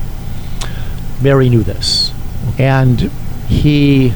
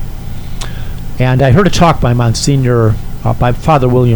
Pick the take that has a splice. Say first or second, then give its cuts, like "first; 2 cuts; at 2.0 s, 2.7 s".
first; 2 cuts; at 1.2 s, 2.5 s